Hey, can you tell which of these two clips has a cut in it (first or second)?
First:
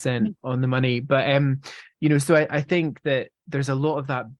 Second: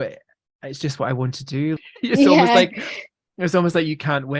second